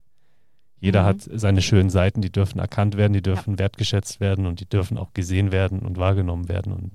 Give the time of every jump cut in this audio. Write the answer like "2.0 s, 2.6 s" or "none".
none